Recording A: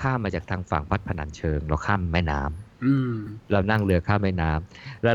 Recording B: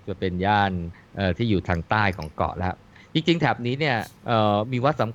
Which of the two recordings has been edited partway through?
B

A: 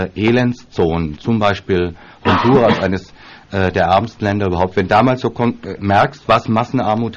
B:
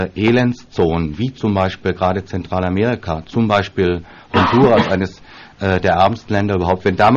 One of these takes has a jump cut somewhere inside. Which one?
A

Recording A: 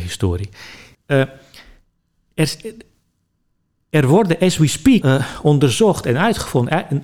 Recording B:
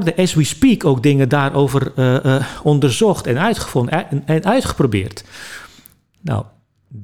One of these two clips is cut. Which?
A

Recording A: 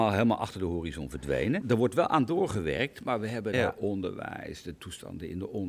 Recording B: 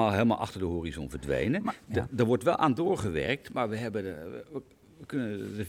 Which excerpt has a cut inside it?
A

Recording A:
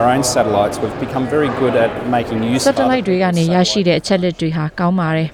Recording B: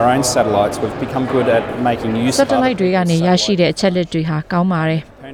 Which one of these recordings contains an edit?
B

